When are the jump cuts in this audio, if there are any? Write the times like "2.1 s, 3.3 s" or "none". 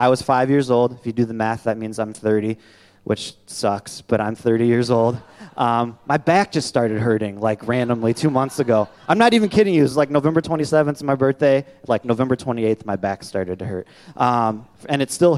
none